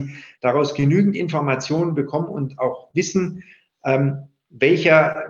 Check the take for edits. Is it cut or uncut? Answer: uncut